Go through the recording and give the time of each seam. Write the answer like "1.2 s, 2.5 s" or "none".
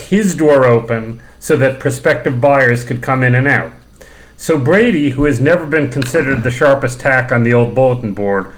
none